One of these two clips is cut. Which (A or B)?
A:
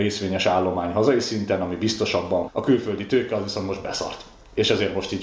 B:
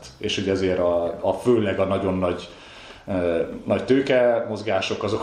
A